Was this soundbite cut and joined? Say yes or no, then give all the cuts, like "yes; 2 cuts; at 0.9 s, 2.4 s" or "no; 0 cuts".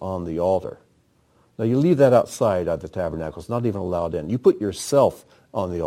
no; 0 cuts